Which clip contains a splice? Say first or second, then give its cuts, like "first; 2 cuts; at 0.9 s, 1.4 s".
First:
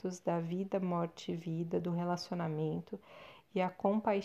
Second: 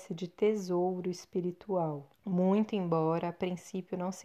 second; 1 cut; at 2.1 s